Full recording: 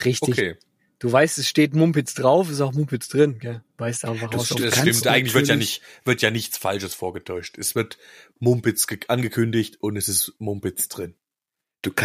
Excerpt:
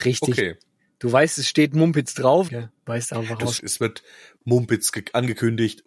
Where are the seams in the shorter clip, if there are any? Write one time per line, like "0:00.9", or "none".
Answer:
0:02.5
0:03.6